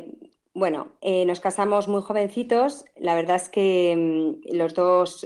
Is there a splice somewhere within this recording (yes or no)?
no